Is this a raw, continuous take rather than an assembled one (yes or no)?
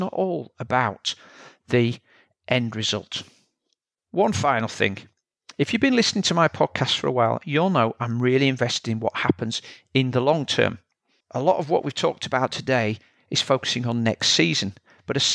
no